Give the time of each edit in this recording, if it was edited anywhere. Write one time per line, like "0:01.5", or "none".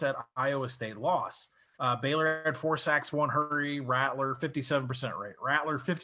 none